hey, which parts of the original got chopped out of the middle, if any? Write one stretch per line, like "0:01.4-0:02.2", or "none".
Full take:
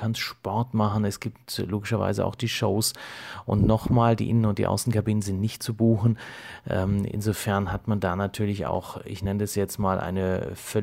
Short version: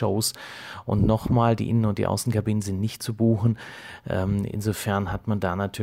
none